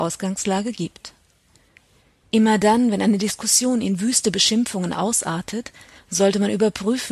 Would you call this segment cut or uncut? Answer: uncut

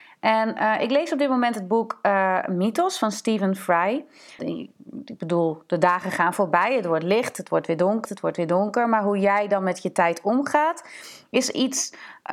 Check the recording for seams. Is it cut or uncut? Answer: cut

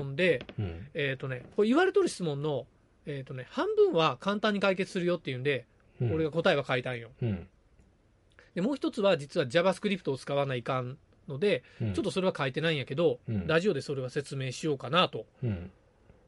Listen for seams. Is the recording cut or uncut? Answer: uncut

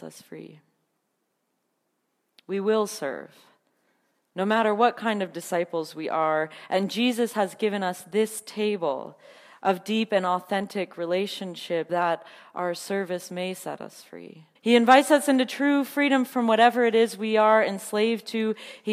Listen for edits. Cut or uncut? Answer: cut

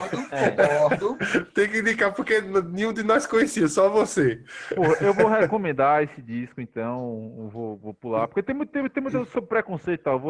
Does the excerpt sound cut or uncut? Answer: uncut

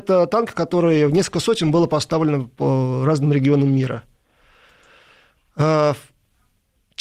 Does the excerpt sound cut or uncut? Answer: uncut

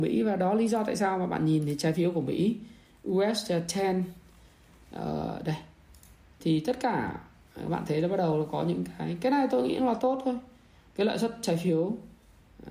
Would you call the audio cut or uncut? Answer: uncut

